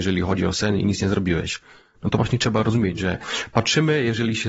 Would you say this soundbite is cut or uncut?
uncut